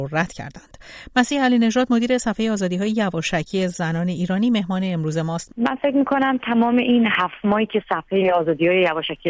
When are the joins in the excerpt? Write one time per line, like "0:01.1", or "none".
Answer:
0:05.5